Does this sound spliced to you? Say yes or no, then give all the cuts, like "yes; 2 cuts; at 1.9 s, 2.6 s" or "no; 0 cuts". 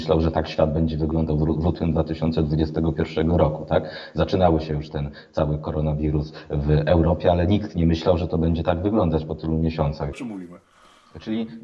yes; 1 cut; at 10.1 s